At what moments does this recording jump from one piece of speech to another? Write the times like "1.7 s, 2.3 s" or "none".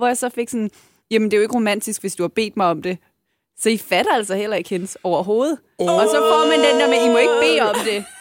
none